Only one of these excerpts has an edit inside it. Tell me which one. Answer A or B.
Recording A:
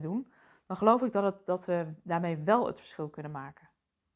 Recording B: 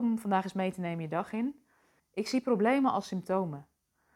B